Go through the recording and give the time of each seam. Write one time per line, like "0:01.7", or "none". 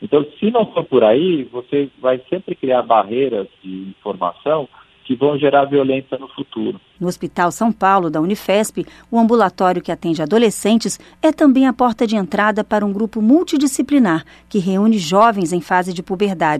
0:06.9